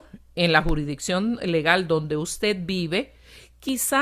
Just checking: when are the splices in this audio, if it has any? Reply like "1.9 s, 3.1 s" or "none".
none

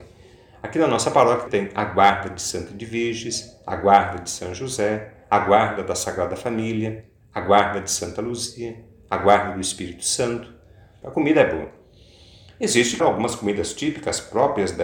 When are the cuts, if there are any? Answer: 1.5 s, 11.0 s, 13.0 s

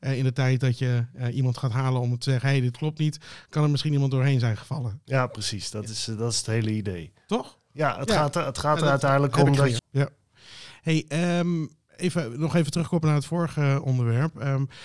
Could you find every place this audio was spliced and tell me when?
9.8 s

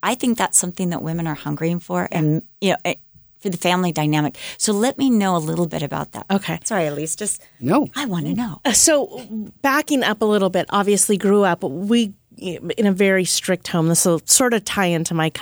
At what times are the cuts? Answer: none

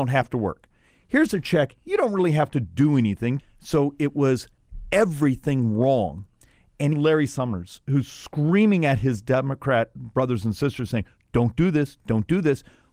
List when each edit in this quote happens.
3.4 s, 6.9 s

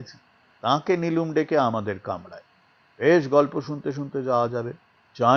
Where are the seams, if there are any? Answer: none

